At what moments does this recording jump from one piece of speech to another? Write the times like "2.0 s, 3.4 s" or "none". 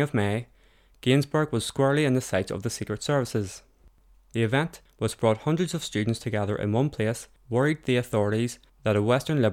none